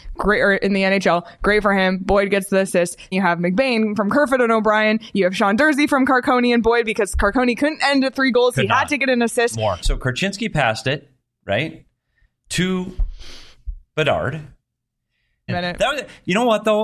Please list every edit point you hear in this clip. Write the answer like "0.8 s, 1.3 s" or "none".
3.1 s, 9.8 s, 15.5 s